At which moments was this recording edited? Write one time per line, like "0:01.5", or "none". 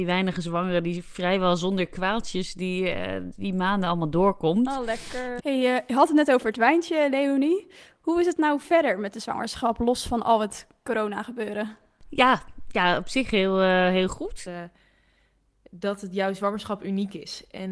0:05.4
0:14.4